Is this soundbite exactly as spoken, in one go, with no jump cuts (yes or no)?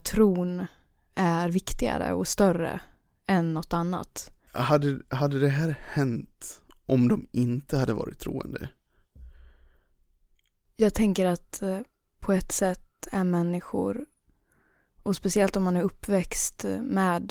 no